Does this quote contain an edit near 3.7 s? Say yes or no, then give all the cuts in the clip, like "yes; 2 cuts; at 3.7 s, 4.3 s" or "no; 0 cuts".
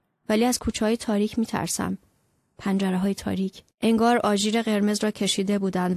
yes; 1 cut; at 3.7 s